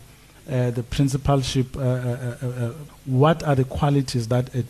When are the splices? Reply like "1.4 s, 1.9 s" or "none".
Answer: 2.9 s